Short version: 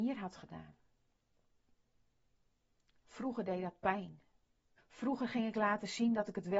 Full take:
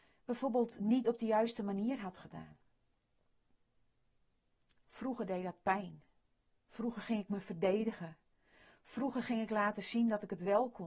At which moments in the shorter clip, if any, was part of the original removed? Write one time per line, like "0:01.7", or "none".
0:04.8